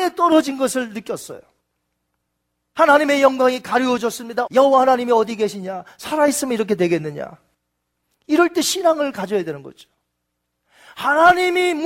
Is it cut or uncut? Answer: cut